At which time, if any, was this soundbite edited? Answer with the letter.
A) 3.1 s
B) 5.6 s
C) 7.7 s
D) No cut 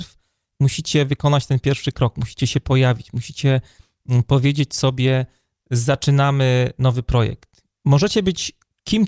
C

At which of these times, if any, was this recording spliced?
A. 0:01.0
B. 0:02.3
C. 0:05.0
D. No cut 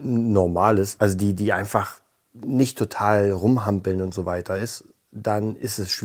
A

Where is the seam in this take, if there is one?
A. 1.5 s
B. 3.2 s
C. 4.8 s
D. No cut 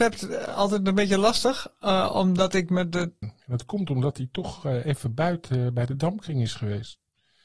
B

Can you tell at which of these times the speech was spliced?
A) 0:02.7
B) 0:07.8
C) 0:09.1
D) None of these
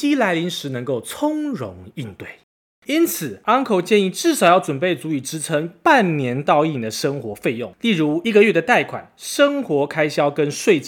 A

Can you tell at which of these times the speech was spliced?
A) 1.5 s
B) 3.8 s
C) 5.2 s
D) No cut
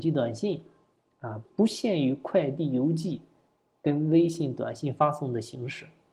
A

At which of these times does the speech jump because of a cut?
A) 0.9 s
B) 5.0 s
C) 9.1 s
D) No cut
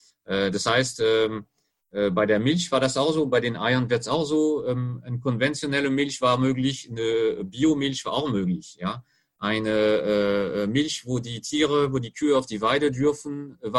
D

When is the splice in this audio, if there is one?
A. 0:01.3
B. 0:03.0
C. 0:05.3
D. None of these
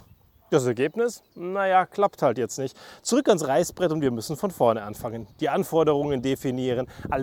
A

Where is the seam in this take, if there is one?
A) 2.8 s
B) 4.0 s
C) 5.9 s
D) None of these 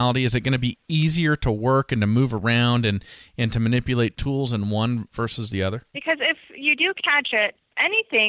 C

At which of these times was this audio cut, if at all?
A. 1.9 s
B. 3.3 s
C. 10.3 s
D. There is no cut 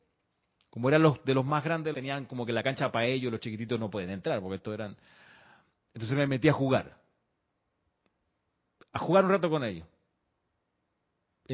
A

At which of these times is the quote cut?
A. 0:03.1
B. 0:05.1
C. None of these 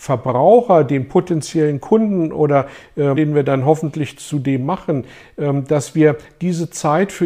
A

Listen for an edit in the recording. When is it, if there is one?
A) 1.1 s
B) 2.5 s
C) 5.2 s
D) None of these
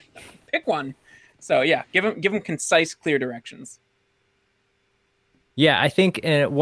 D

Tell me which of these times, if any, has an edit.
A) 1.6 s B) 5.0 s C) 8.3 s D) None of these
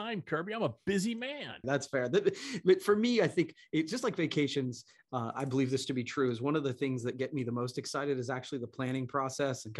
A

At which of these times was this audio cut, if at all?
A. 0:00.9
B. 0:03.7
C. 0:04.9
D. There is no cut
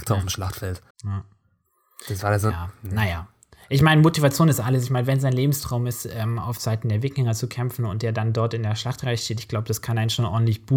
A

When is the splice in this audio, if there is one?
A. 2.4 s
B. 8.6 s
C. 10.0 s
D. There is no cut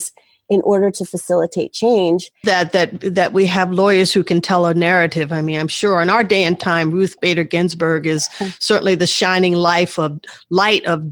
A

